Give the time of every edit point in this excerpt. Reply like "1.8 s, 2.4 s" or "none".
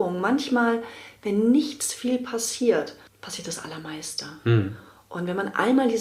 none

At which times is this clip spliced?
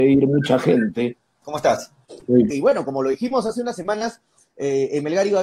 1.4 s, 2.5 s

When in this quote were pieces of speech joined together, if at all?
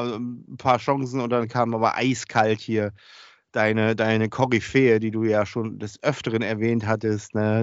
none

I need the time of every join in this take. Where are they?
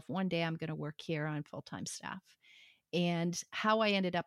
none

